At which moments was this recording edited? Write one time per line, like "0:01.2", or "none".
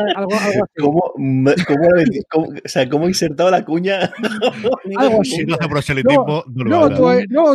none

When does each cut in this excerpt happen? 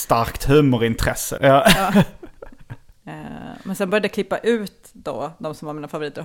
0:01.4
0:02.9

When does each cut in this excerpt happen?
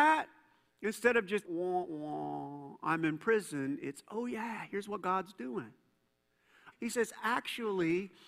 0:01.4
0:06.7

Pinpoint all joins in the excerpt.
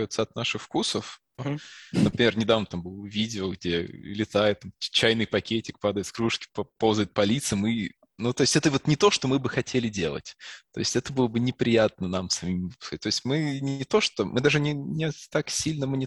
0:01.4

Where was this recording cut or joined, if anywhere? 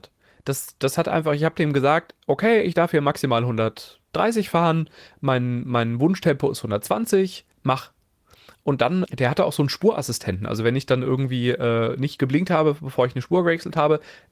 0:07.5
0:09.1

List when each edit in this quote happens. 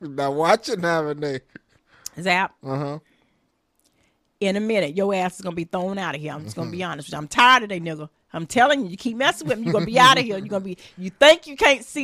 none

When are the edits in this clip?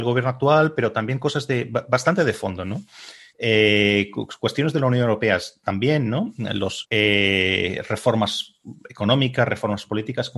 0:03.3
0:06.8

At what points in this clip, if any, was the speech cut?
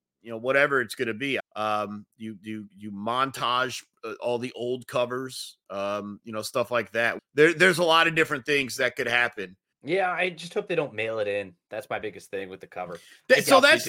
0:01.4
0:07.2
0:09.7

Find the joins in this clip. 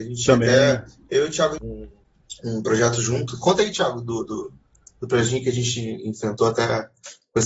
0:01.6

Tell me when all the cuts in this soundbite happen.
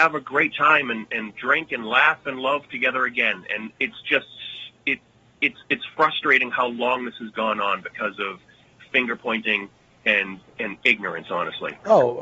0:03.7

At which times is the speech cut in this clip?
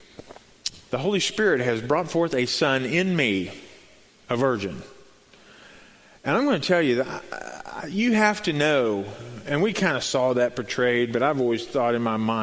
none

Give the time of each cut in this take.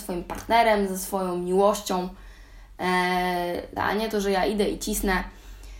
0:03.8

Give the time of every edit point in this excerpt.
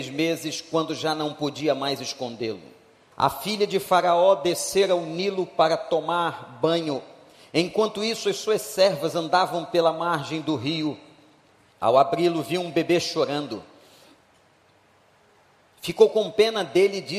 0:03.1
0:11.7

